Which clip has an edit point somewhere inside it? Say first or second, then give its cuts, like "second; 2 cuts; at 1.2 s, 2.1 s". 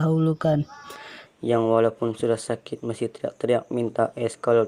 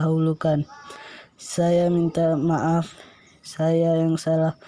first; 1 cut; at 1.2 s